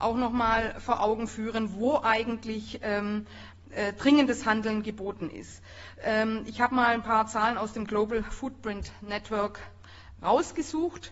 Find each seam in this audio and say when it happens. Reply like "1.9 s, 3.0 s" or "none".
none